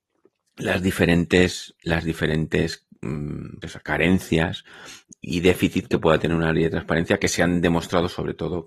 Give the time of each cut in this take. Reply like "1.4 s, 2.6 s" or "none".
3.6 s